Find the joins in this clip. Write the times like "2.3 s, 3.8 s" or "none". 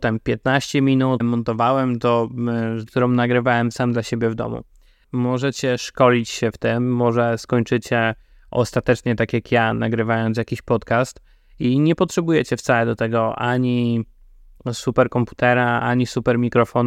1.2 s, 2.9 s, 5.0 s